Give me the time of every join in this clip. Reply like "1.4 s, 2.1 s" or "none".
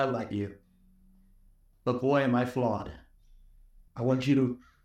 3.9 s